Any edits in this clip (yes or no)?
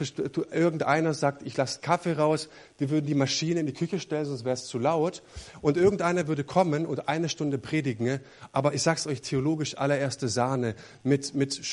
no